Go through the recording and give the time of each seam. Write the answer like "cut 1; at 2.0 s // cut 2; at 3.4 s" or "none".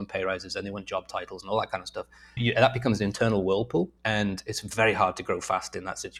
cut 1; at 2.4 s // cut 2; at 4.0 s